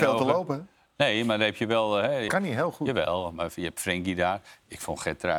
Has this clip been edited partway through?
yes; 1 cut; at 2.3 s

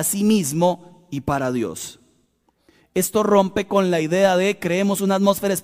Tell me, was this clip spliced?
no; 0 cuts

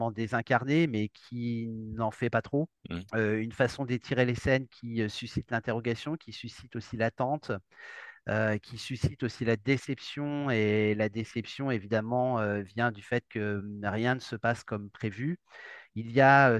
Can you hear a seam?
yes; 1 cut; at 2.8 s

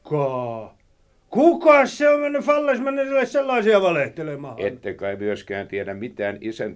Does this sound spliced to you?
no; 0 cuts

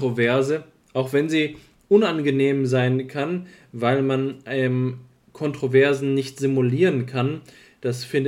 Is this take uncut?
yes; 0 cuts

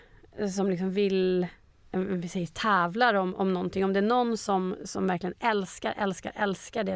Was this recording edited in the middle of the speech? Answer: no; 0 cuts

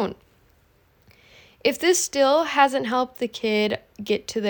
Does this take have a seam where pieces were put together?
no; 0 cuts

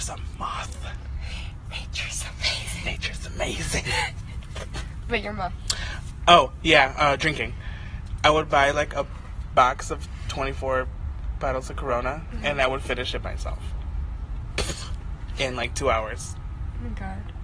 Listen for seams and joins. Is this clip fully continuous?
yes; 0 cuts

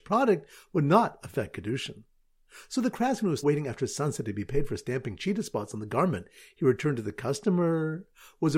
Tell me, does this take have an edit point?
yes; 1 cut; at 3.4 s

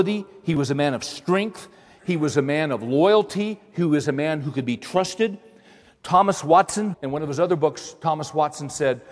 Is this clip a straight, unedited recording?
no; 1 cut; at 6.9 s

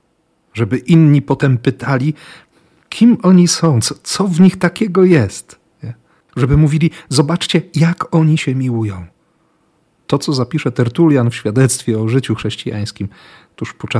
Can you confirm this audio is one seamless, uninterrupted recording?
yes; 0 cuts

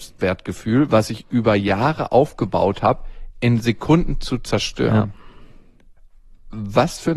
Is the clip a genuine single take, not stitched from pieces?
yes; 0 cuts

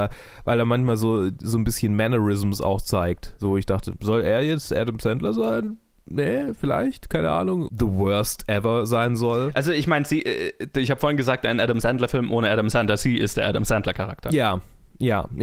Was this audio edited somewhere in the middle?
yes; 1 cut; at 7.7 s

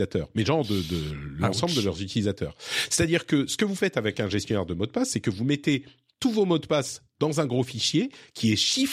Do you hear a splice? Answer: no; 0 cuts

